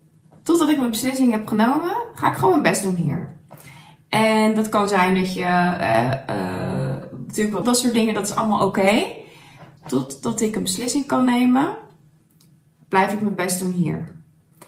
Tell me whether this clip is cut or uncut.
cut